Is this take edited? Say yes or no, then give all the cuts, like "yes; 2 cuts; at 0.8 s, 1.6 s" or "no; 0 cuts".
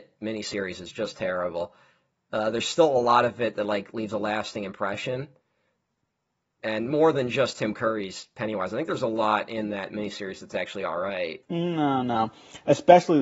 yes; 1 cut; at 11.4 s